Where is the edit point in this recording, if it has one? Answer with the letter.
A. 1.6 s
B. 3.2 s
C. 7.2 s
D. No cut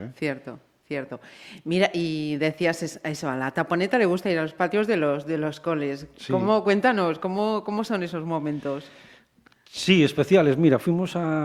D